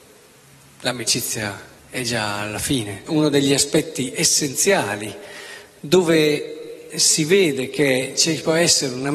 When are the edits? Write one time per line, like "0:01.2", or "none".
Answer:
0:01.8
0:03.1